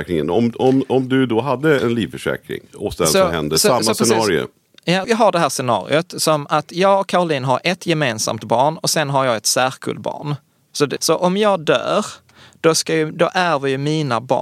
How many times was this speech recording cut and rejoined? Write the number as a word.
two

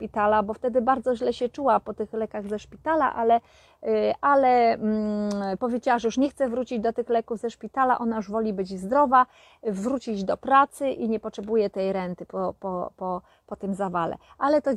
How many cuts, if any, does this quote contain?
zero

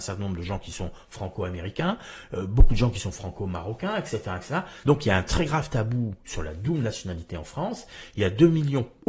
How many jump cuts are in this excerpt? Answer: one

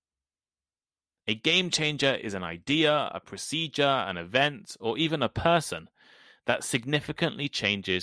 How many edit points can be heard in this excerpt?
zero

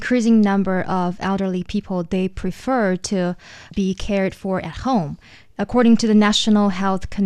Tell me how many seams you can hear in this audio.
zero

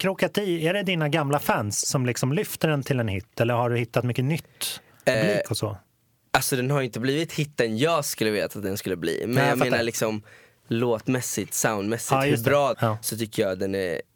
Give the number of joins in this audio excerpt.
two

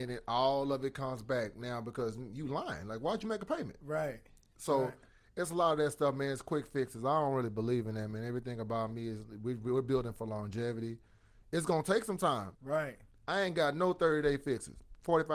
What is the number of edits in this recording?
one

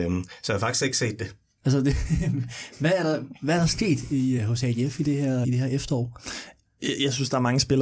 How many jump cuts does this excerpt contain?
three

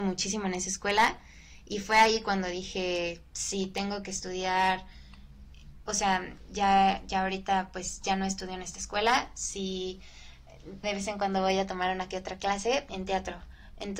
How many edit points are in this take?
two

